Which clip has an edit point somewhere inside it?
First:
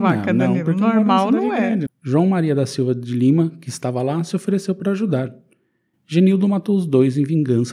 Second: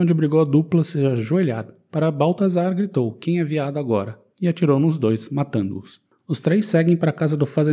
first; 1 cut; at 1.9 s

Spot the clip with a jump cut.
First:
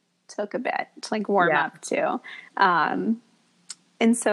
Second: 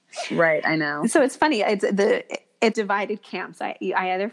second; 1 cut; at 2.7 s

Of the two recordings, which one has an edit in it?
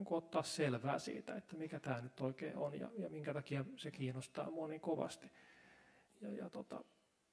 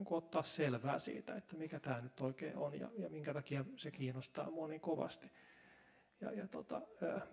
first; 1 cut; at 6.1 s

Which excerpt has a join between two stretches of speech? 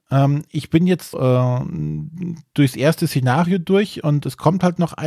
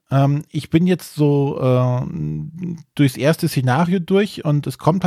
first; 1 cut; at 1.1 s

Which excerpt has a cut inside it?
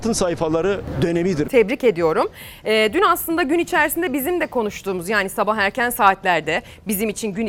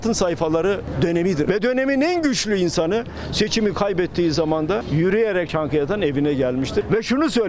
first; 1 cut; at 1.4 s

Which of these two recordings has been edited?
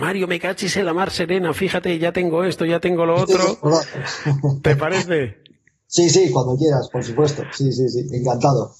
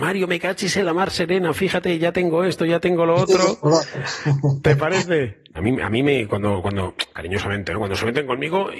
second; 1 cut; at 5.5 s

